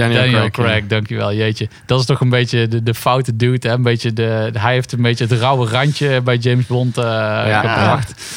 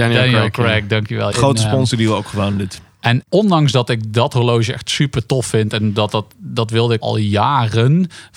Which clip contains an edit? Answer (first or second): second